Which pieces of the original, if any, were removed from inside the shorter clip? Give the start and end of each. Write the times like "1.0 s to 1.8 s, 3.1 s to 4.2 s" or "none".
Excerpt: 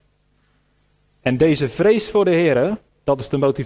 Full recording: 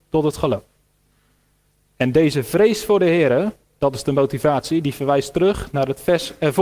none